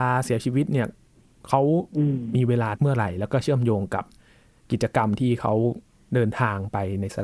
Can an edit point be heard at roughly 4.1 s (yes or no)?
no